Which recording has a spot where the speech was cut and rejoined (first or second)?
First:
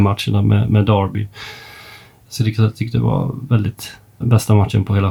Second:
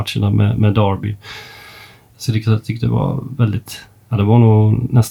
first